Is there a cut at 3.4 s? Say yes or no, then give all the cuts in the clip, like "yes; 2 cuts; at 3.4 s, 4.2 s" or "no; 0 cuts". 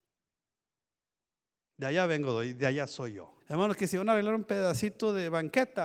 yes; 1 cut; at 3.4 s